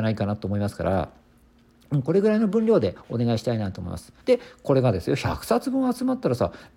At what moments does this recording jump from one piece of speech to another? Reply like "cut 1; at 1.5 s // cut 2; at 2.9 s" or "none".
cut 1; at 4.2 s